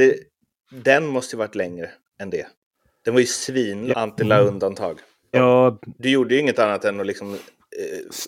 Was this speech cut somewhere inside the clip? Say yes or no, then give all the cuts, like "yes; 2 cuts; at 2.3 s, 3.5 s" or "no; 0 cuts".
yes; 2 cuts; at 3.9 s, 5.3 s